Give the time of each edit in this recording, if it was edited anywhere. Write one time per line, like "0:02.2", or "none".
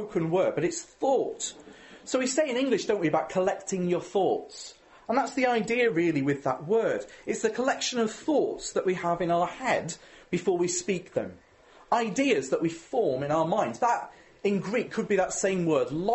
none

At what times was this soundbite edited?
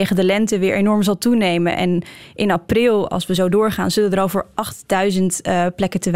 none

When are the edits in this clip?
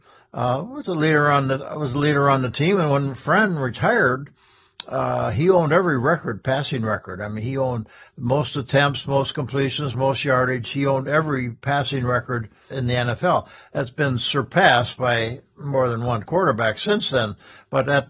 0:09.9
0:12.7

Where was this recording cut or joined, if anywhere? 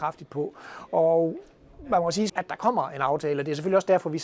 0:02.3

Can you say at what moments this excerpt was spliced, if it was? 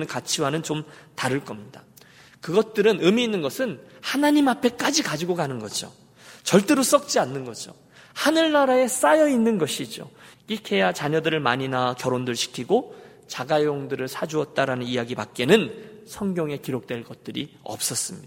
0:10.3

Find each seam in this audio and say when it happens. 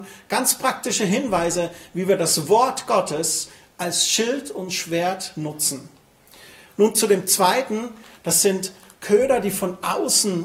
none

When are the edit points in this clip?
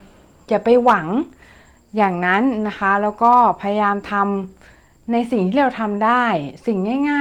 none

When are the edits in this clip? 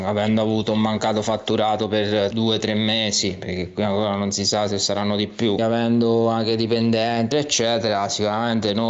0:05.6
0:07.3

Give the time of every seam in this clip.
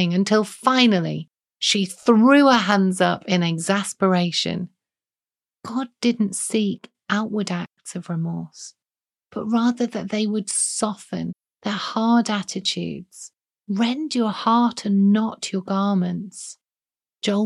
0:05.6

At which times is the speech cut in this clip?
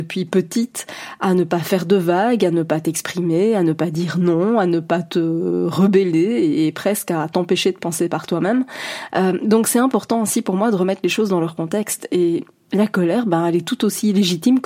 none

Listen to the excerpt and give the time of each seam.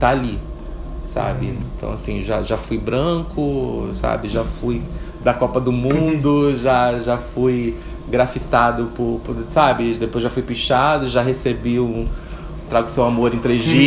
0:12.7

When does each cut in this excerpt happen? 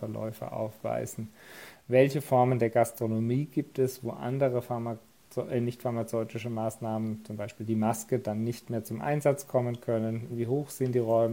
0:10.3

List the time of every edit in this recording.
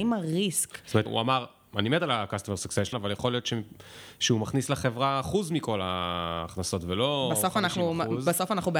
0:01.1
0:02.9

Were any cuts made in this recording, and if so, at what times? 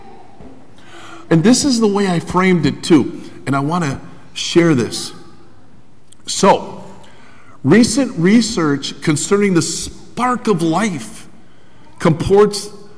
0:01.3

